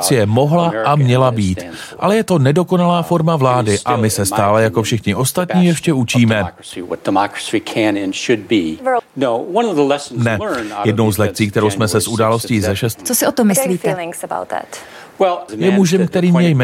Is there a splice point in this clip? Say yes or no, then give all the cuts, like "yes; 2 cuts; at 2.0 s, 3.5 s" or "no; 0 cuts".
yes; 3 cuts; at 9.0 s, 12.9 s, 15.5 s